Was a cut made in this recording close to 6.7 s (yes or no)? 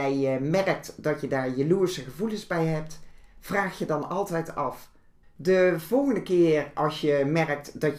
no